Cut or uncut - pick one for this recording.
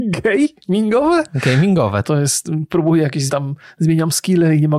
cut